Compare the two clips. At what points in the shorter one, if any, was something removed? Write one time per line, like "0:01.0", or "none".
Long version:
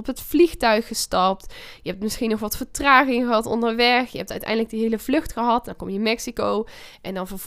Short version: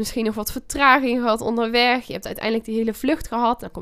none